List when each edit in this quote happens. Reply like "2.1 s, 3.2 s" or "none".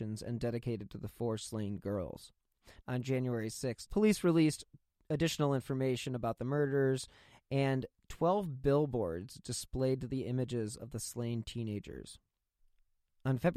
2.8 s, 3.9 s